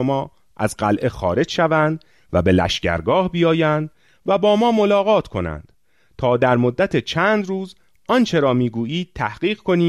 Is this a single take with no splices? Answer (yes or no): yes